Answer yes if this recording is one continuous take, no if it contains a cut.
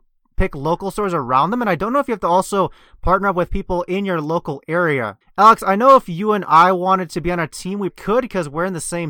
no